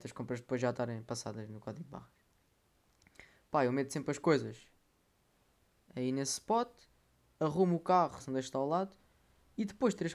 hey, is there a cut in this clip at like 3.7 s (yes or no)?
no